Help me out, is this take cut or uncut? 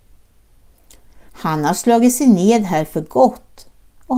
cut